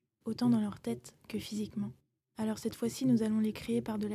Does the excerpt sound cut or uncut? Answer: uncut